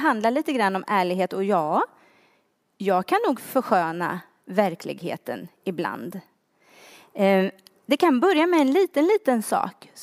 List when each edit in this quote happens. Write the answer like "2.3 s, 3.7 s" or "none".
none